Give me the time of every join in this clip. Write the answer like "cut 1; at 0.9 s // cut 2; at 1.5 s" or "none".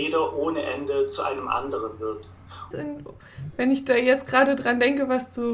cut 1; at 2.7 s